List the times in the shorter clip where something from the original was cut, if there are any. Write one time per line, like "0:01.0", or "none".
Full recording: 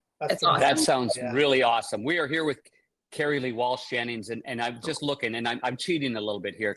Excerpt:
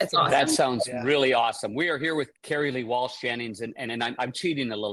0:02.4
0:03.9